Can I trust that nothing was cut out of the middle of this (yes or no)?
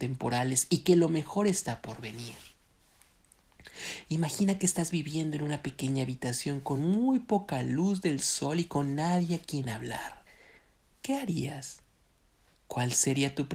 yes